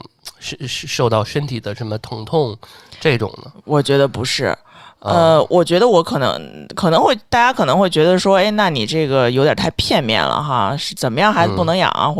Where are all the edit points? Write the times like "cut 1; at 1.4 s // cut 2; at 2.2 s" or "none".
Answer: none